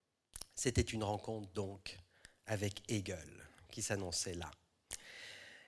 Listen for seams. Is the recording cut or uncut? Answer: uncut